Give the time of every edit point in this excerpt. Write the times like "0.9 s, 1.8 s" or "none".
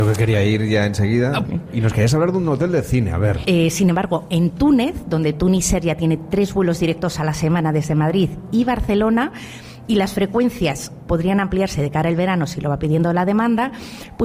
1.4 s, 3.4 s